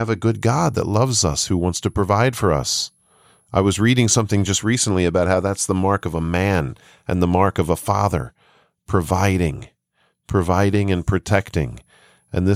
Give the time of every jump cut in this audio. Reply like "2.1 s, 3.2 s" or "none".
none

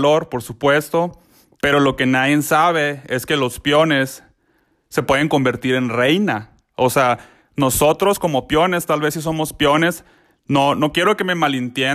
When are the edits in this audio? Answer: 1.6 s

